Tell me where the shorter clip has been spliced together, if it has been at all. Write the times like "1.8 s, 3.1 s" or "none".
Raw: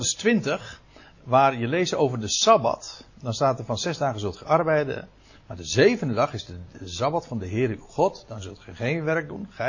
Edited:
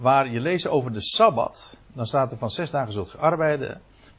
none